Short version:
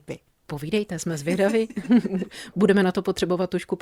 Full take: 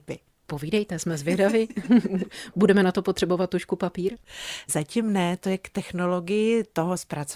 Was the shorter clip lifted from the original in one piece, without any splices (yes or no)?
yes